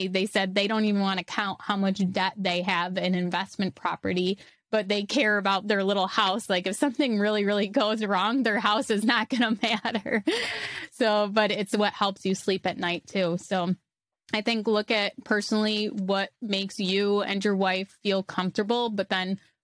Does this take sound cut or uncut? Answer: uncut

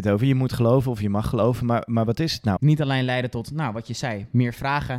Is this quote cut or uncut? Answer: cut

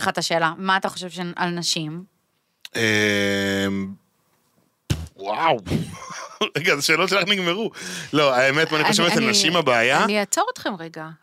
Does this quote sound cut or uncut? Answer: uncut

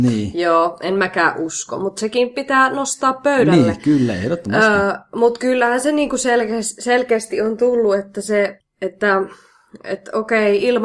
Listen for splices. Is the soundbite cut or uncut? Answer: uncut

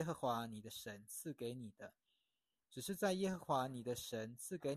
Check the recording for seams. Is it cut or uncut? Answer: cut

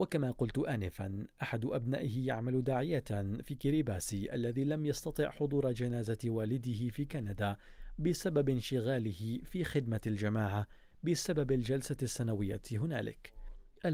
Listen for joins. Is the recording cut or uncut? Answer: uncut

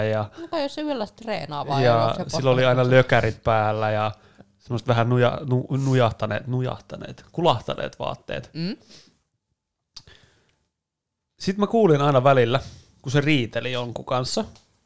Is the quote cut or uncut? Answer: uncut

